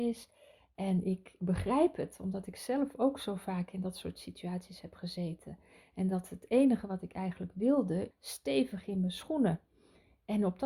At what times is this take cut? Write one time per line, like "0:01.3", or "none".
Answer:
0:08.1